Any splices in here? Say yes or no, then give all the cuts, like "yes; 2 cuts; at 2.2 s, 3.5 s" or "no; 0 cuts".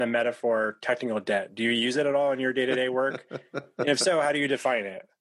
no; 0 cuts